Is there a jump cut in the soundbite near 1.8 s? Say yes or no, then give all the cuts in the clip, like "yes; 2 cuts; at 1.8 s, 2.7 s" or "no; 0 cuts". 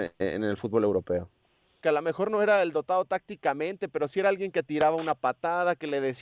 yes; 1 cut; at 1.8 s